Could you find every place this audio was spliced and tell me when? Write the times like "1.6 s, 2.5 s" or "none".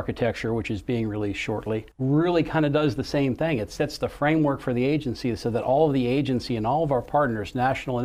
1.9 s

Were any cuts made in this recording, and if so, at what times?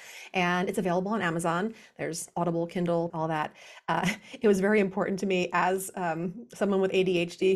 3.1 s

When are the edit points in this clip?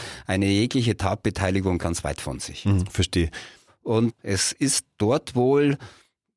1.8 s, 3.7 s

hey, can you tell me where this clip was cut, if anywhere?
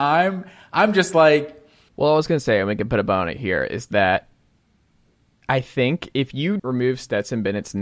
1.9 s, 6.6 s

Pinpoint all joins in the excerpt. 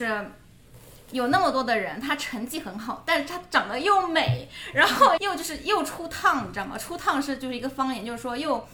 5.2 s

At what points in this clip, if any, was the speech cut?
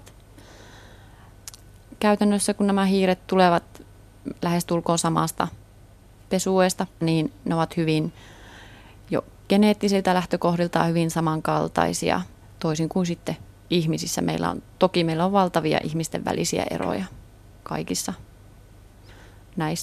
7.0 s, 12.4 s

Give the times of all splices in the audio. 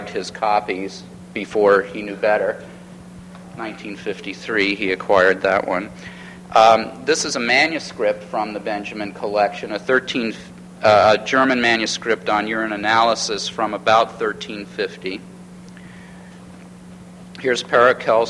none

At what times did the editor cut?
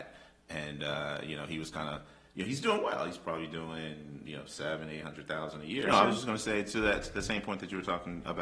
5.8 s

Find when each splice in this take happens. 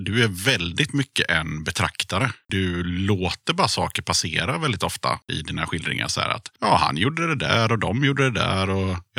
none

